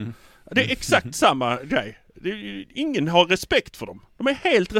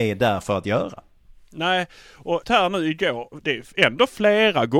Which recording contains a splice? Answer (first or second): second